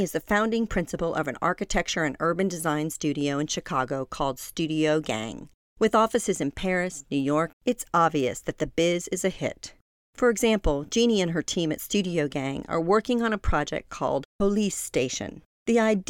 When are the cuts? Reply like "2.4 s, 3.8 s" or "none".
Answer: 7.5 s, 10.0 s

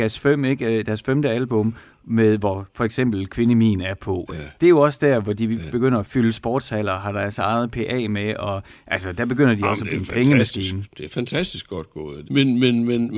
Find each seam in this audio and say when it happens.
4.6 s, 12.2 s

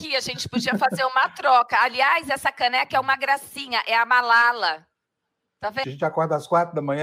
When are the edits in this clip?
5.8 s

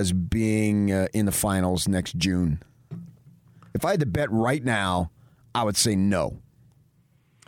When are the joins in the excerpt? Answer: none

